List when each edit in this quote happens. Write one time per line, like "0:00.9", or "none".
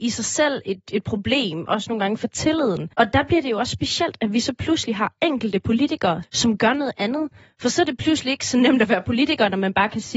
0:02.9
0:06.2